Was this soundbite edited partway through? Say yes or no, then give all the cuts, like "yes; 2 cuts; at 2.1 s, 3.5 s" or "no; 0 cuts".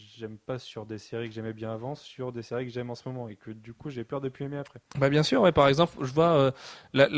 no; 0 cuts